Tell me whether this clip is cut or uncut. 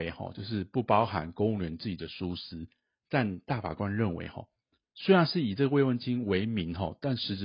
cut